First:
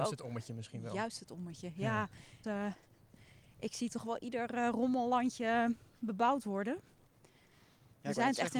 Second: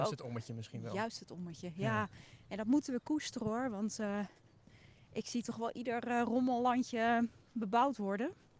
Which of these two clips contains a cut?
first; 1 cut; at 2.4 s

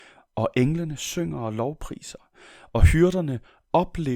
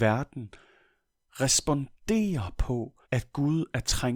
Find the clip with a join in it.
second; 1 cut; at 3.0 s

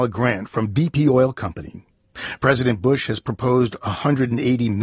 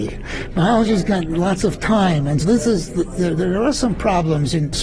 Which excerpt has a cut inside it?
second; 1 cut; at 2.4 s

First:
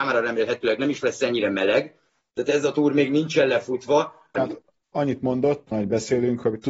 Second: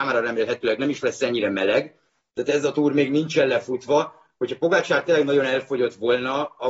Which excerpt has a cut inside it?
first; 2 cuts; at 4.3 s, 5.7 s

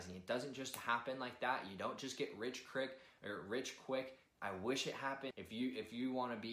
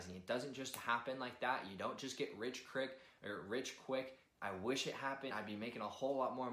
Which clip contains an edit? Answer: first; 1 cut; at 5.3 s

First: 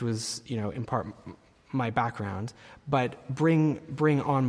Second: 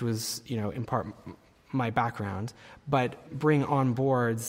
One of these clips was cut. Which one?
second; 1 cut; at 3.3 s

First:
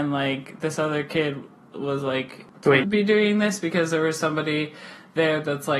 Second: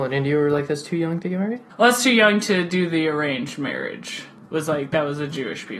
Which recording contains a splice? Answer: first; 1 cut; at 2.8 s

